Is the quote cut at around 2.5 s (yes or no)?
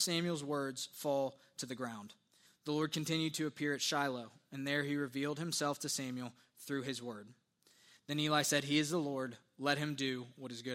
yes